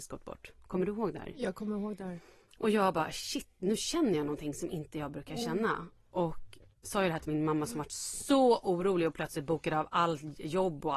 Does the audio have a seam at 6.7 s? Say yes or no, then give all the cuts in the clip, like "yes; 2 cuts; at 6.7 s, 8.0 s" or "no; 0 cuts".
yes; 1 cut; at 6.7 s